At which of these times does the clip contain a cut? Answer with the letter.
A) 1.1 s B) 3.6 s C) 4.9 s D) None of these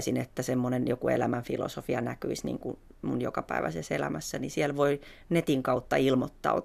D